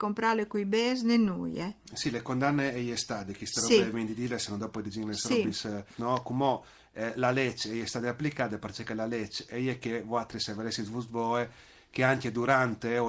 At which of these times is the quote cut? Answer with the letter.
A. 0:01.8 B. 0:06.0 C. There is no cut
B